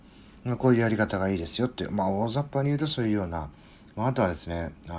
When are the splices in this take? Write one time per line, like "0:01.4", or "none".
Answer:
0:03.9

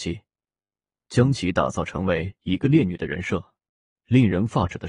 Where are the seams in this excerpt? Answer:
0:04.0

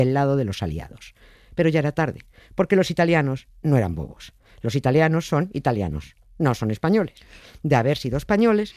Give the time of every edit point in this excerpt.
none

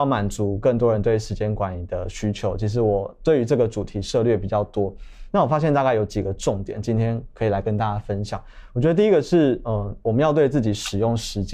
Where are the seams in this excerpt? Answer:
none

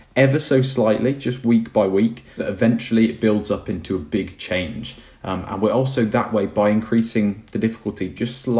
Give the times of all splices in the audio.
0:02.4

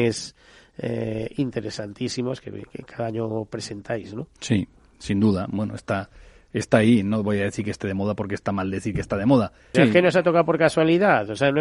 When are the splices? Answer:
0:09.7

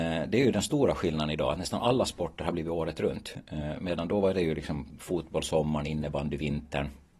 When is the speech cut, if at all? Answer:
none

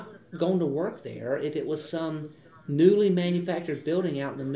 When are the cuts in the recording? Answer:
none

